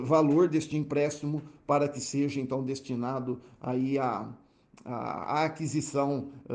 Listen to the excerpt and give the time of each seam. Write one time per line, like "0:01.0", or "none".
none